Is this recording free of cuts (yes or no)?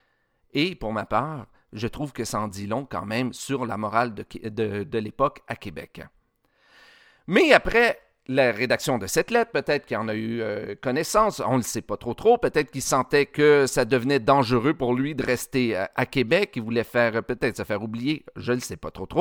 yes